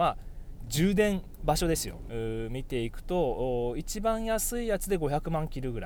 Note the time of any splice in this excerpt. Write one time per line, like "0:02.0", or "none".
0:02.1

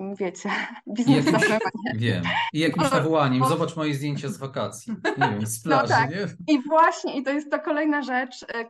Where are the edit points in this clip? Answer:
none

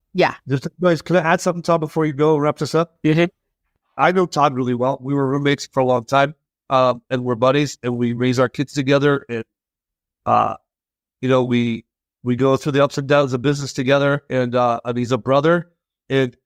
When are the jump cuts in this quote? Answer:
0:04.0

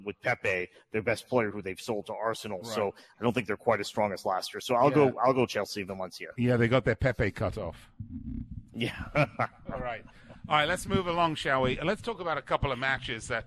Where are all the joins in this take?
none

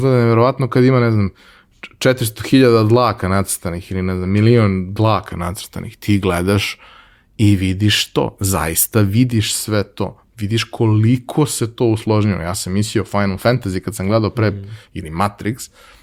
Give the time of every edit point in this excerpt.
none

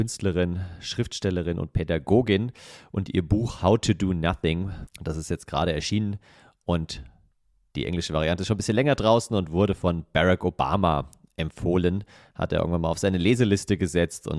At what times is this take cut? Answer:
0:04.9

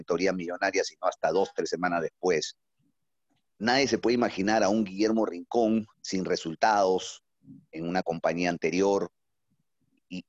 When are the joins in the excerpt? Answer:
0:03.5
0:05.9

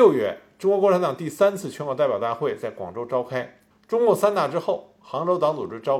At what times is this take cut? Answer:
0:03.7

